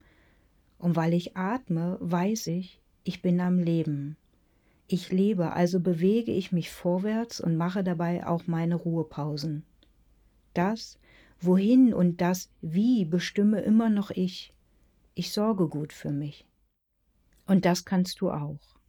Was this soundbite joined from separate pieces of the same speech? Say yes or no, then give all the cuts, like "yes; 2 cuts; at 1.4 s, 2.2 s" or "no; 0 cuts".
no; 0 cuts